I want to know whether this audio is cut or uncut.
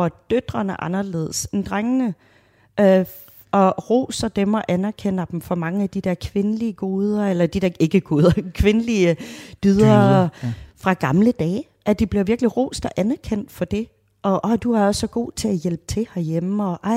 uncut